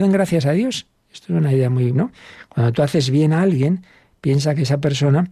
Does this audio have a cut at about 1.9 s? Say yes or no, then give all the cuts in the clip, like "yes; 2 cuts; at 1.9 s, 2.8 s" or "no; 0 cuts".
yes; 1 cut; at 1.9 s